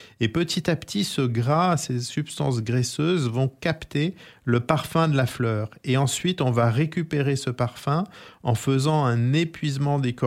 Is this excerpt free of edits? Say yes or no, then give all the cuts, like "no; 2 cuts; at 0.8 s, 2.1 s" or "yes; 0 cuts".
yes; 0 cuts